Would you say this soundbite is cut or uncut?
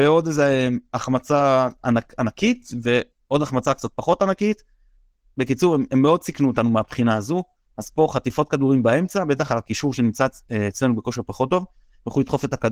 uncut